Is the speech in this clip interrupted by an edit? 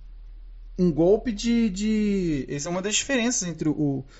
no; 0 cuts

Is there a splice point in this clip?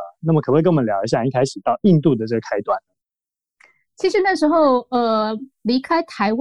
no; 0 cuts

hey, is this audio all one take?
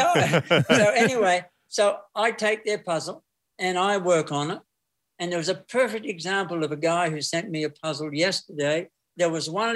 yes; 0 cuts

